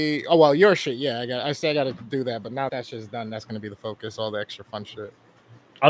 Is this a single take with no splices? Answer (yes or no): no